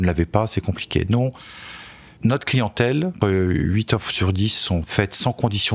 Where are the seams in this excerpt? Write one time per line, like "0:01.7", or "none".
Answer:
0:03.2